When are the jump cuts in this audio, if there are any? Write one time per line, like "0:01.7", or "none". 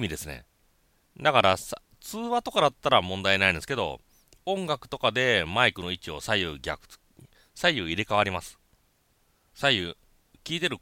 0:07.5
0:09.5